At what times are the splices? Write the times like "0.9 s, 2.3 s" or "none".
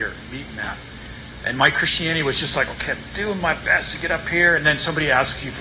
none